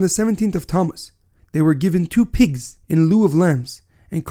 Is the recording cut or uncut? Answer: cut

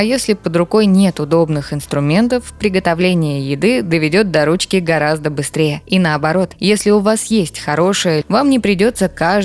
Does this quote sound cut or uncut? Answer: cut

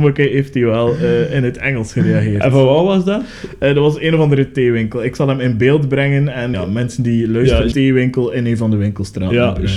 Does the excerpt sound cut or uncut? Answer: cut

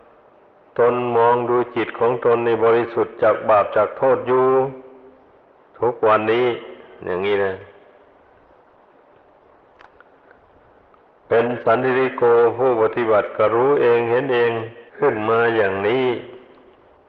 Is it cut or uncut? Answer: cut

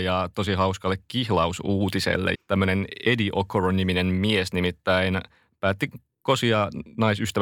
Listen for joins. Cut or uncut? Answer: cut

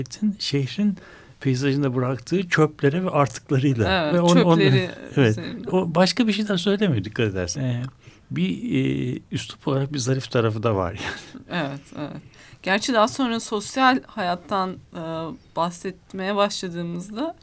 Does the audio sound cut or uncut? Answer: cut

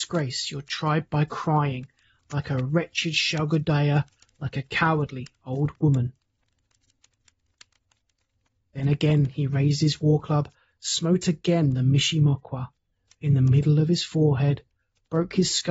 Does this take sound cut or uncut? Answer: uncut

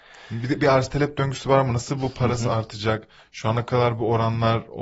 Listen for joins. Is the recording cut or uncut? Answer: uncut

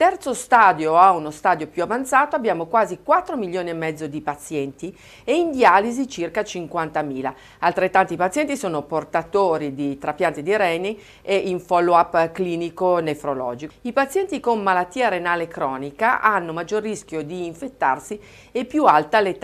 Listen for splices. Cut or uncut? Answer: cut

